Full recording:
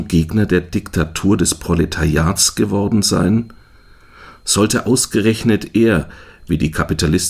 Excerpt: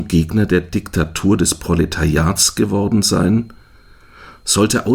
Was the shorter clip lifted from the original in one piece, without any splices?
yes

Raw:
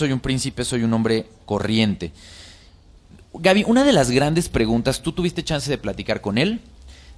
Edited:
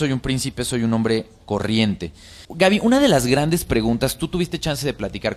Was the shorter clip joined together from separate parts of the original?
yes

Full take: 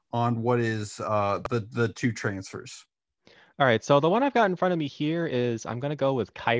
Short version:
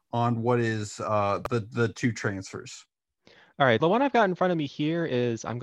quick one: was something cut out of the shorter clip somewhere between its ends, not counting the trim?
yes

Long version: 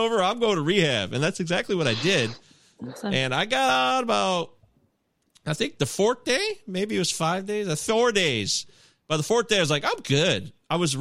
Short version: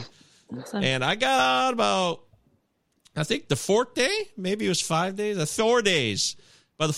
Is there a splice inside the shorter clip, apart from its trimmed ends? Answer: no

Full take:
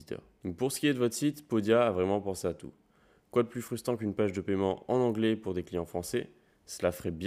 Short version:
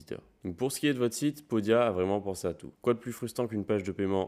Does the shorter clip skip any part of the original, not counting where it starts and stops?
yes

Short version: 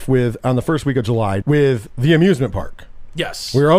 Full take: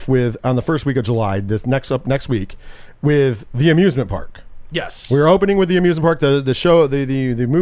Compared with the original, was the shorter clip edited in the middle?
yes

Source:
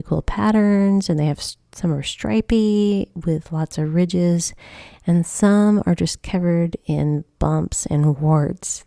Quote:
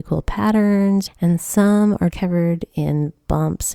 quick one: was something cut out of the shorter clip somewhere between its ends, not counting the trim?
yes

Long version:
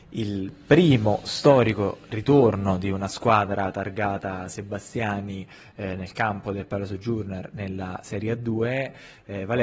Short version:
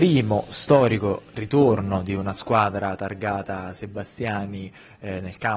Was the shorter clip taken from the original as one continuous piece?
yes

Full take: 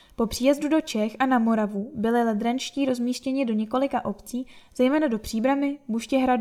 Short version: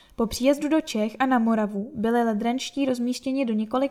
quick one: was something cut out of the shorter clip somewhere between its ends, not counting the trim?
no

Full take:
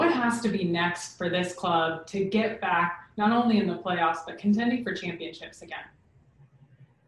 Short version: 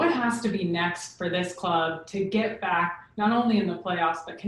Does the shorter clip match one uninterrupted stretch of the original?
yes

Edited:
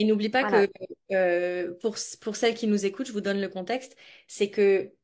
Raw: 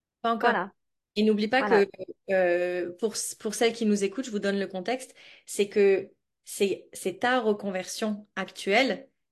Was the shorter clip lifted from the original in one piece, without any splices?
yes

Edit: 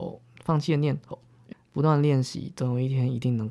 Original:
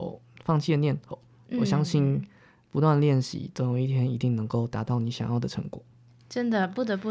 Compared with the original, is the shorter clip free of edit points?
no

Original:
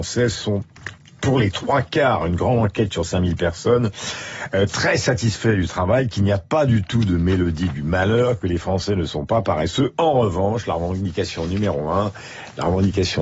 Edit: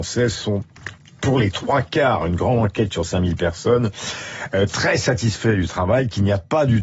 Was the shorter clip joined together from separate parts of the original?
no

